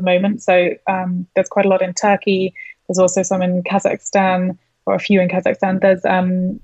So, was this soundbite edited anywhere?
no; 0 cuts

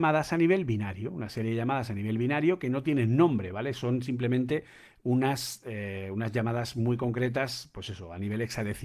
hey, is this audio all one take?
yes; 0 cuts

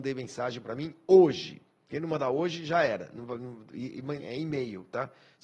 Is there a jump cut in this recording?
yes; 1 cut; at 4.2 s

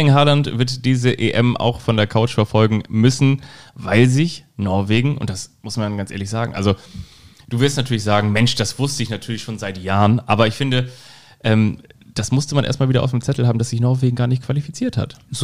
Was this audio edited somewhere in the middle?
no; 0 cuts

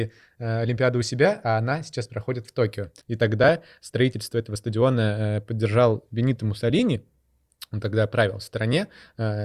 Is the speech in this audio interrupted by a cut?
yes; 1 cut; at 3.0 s

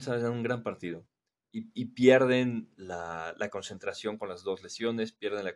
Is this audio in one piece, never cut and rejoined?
yes; 0 cuts

